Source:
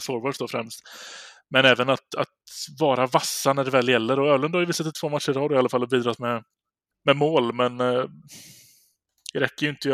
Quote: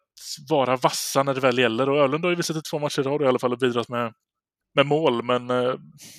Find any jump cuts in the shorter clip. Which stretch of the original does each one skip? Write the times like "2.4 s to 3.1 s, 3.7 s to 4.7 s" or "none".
none